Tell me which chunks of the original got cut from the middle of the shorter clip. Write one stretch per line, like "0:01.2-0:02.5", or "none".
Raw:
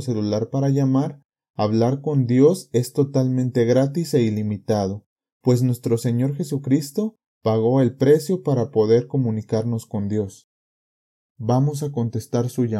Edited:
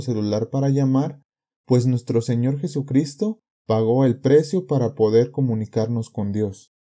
0:01.5-0:05.3